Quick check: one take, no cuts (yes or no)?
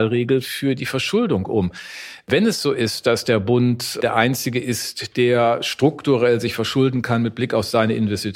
yes